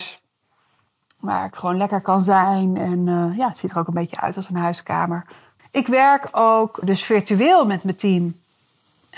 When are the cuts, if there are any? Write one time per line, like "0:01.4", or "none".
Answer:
0:05.6
0:06.8